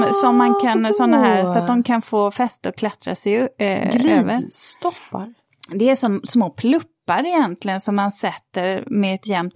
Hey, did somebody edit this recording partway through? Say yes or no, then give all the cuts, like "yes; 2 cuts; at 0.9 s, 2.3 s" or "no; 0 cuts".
no; 0 cuts